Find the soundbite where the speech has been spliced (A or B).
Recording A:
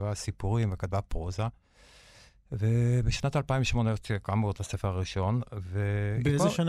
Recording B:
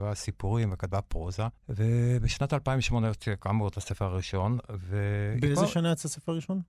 B